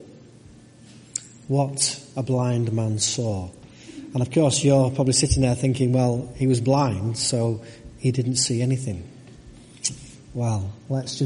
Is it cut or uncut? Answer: uncut